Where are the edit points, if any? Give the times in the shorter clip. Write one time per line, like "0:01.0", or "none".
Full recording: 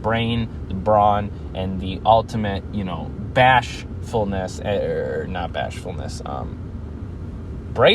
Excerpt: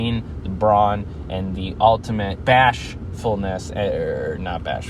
0:02.4